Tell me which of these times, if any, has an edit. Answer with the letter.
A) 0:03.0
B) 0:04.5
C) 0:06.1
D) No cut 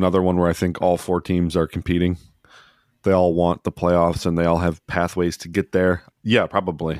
C